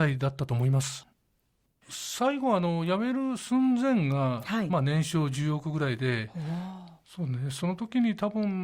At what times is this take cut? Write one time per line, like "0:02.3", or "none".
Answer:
none